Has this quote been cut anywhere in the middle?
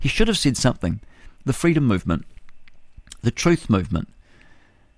yes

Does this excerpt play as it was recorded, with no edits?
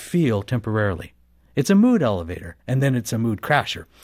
no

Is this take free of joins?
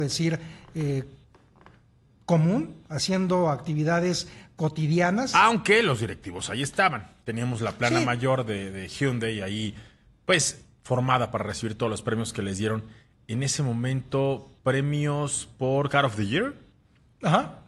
no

